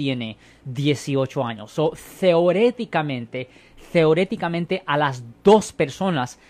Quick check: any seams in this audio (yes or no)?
no